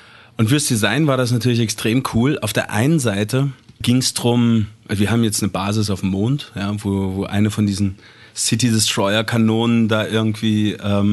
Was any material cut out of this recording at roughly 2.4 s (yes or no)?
no